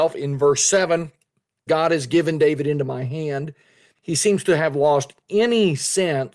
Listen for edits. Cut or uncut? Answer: cut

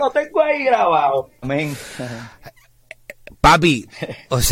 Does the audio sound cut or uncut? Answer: cut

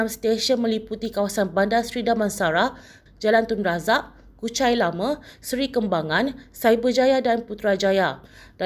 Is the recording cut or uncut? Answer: cut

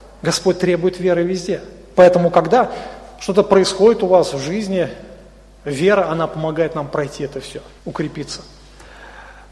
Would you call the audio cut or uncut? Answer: cut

